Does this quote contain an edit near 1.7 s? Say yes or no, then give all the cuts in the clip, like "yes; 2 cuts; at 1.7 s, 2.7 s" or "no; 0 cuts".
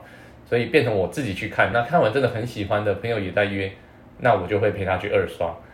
no; 0 cuts